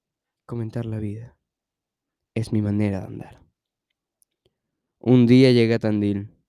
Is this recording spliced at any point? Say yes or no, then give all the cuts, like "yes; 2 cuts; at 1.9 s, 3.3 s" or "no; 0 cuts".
no; 0 cuts